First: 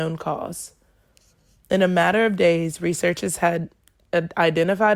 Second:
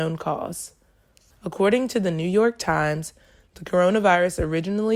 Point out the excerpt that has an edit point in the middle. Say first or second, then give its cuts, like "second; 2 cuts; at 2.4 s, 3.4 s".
second; 1 cut; at 1.3 s